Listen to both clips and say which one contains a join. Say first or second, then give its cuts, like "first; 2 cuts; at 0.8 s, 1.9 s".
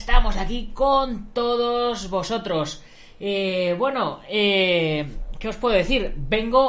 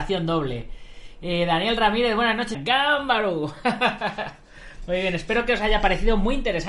second; 1 cut; at 2.5 s